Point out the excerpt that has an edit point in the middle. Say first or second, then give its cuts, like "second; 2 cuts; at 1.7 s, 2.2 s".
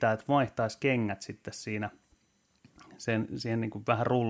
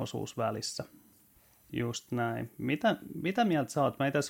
second; 1 cut; at 1.7 s